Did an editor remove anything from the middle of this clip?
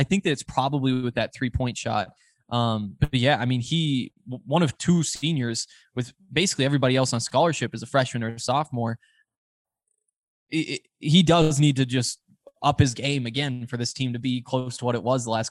no; 0 cuts

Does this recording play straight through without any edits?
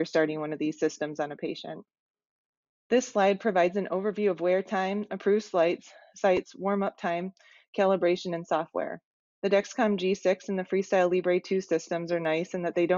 no; 2 cuts; at 2.8 s, 9.3 s

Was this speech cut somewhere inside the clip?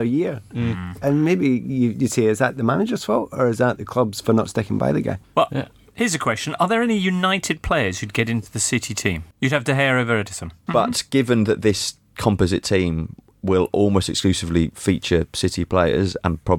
yes; 2 cuts; at 9.3 s, 10.7 s

